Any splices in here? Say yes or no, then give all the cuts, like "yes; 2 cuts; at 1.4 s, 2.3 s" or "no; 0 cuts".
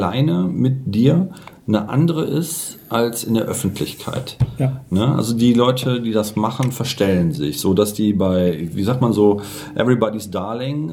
no; 0 cuts